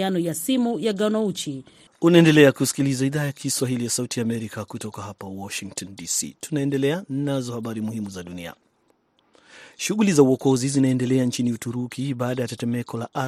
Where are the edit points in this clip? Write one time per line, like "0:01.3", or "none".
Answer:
0:01.9